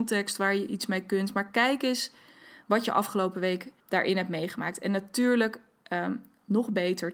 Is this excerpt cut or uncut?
cut